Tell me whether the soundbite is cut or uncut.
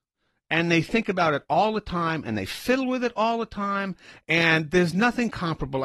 uncut